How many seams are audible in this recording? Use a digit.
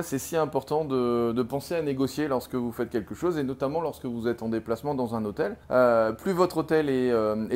1